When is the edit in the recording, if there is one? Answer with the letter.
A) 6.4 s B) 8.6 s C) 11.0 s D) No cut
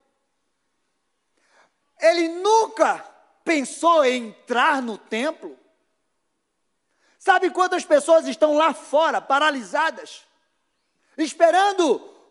C